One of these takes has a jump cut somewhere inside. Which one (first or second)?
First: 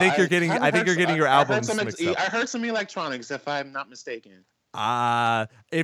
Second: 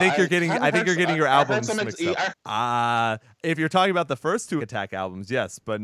second